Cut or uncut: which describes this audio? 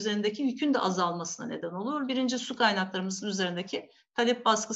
uncut